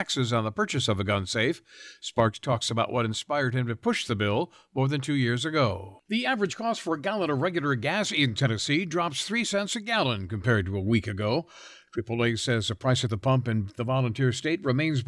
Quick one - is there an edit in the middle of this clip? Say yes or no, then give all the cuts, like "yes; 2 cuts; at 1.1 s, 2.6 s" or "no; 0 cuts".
yes; 1 cut; at 6.0 s